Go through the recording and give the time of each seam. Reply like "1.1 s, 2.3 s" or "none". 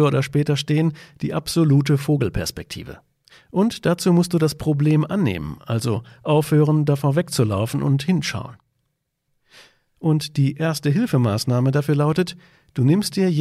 none